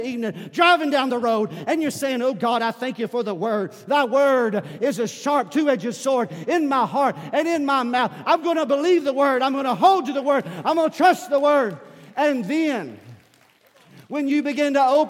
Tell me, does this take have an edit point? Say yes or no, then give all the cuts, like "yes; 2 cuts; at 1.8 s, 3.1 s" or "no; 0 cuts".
yes; 1 cut; at 8.2 s